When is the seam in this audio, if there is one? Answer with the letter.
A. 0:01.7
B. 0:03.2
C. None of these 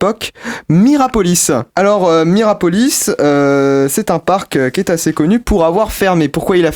A